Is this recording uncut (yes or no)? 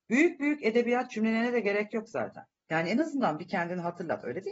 no